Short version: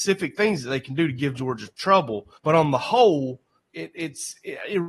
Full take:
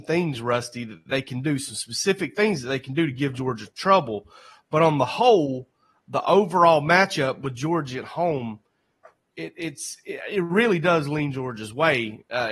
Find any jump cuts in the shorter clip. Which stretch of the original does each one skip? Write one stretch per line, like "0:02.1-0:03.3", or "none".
0:04.3-0:04.6
0:05.8-0:09.2

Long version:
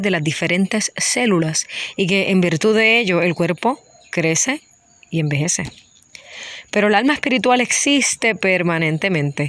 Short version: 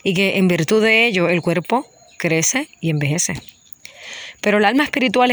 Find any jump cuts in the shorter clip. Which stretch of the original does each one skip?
0:04.7-0:05.0

